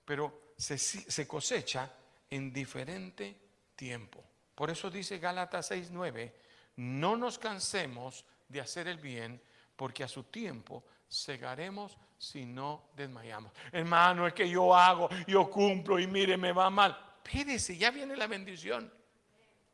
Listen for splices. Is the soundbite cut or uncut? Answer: uncut